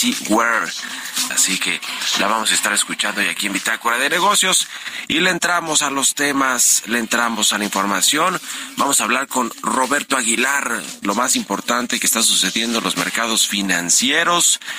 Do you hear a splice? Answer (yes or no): yes